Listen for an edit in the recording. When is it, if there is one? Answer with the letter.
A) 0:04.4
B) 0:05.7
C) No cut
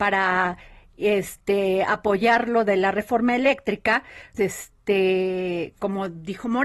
A